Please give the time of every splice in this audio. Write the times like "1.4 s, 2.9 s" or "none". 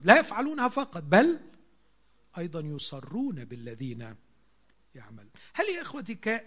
none